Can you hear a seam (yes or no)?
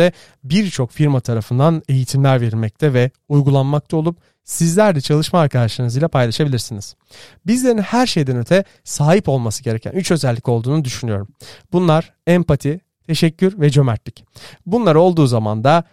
no